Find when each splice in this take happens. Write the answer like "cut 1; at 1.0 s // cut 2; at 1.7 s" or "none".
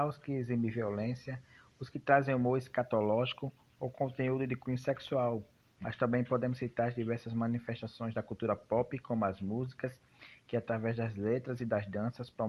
none